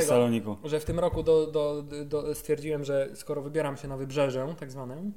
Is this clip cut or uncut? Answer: uncut